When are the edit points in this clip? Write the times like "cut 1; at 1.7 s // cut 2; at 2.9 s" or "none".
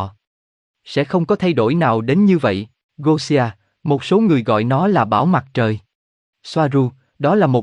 cut 1; at 2.9 s // cut 2; at 6.3 s